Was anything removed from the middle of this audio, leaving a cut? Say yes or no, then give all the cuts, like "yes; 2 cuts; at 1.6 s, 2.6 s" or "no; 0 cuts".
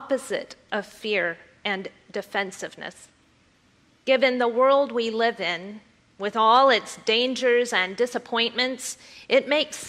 no; 0 cuts